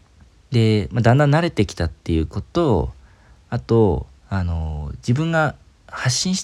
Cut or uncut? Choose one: cut